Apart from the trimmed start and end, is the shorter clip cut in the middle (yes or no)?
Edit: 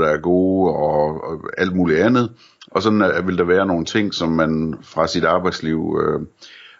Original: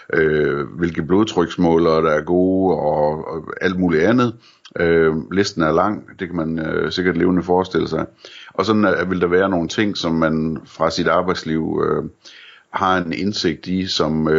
yes